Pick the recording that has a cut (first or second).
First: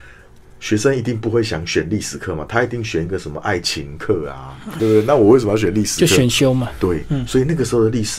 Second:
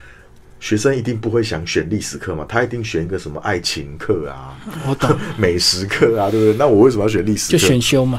first